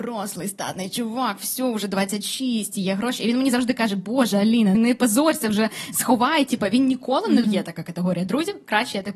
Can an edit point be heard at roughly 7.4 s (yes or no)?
yes